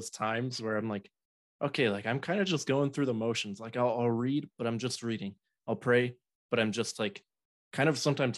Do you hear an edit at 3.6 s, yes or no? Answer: no